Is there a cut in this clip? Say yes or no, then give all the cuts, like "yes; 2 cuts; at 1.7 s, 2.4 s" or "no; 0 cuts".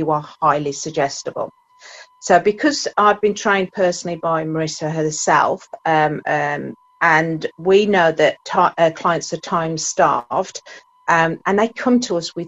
no; 0 cuts